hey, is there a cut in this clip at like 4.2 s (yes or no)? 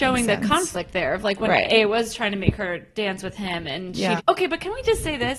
yes